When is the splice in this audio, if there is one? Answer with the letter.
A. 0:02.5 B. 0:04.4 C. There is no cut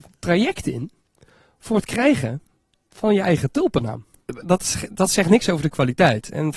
B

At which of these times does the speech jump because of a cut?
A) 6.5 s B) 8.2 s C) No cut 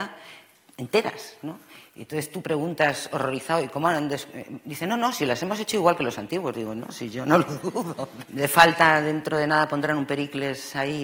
B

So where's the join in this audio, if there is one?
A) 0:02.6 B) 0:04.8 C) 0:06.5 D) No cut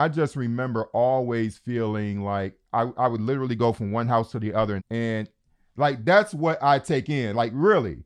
B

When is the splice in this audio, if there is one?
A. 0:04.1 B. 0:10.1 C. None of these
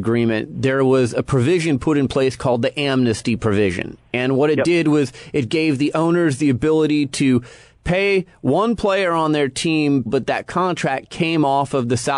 B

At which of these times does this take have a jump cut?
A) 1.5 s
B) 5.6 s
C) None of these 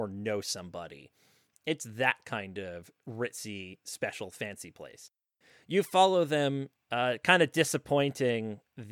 C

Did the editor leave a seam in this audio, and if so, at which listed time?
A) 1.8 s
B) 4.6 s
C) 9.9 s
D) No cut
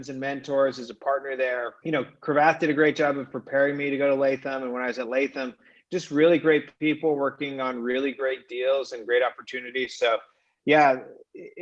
A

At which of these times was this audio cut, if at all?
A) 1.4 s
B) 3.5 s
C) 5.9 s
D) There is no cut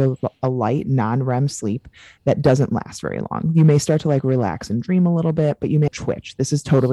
C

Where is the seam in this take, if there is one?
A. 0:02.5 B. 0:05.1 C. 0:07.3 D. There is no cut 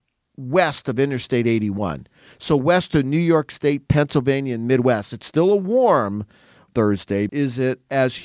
C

